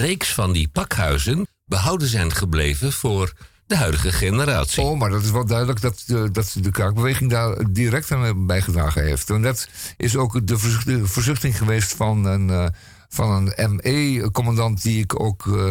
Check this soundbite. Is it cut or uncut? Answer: cut